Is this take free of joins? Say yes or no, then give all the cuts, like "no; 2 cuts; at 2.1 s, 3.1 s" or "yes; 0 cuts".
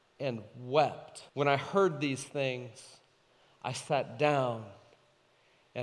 no; 1 cut; at 1.3 s